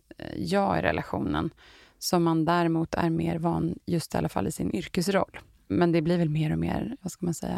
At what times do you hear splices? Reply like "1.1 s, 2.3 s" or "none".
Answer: none